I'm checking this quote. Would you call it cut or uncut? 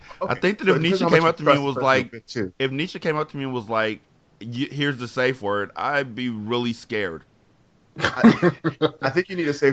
uncut